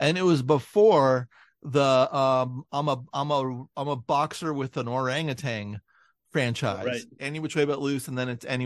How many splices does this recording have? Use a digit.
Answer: 1